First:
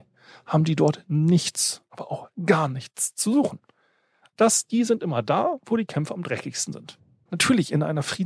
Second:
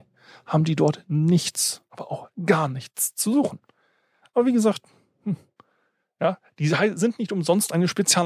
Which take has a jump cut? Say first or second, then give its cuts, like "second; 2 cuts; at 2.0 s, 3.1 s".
first; 2 cuts; at 4.3 s, 7.3 s